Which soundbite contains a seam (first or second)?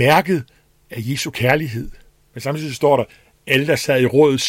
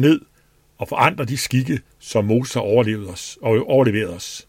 first